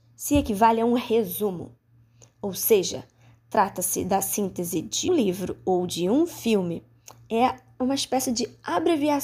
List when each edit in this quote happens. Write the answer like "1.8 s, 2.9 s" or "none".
5.1 s